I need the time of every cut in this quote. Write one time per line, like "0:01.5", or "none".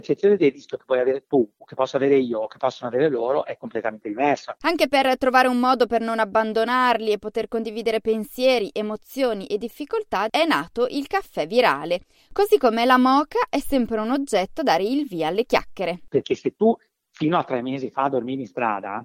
0:04.6
0:16.1